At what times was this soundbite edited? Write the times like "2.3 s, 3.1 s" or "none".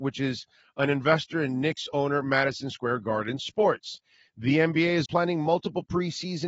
5.1 s